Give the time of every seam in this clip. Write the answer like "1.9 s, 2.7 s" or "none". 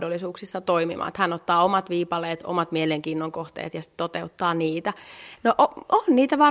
5.4 s